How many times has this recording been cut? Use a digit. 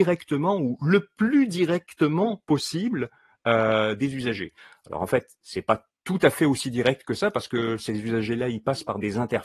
0